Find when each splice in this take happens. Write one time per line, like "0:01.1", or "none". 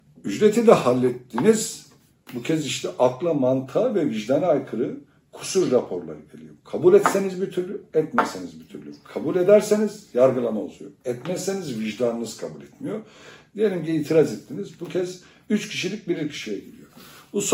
none